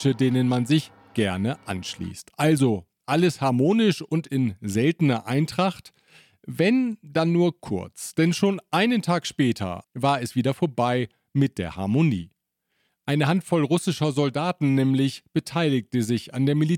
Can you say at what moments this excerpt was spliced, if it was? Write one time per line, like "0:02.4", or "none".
0:09.8